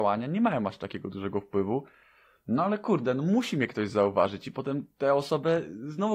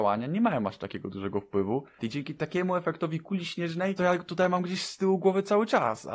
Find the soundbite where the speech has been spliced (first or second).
second